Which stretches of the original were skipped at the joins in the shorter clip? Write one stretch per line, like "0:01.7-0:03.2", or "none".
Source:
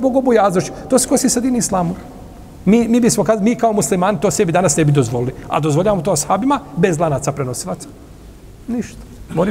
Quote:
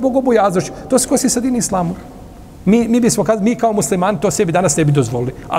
none